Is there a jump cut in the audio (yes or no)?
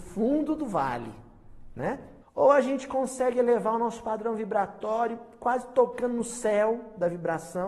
yes